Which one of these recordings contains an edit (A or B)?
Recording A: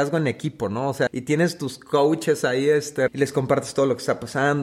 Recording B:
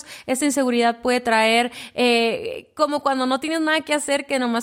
A